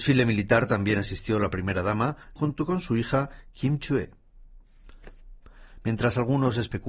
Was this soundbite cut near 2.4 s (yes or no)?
yes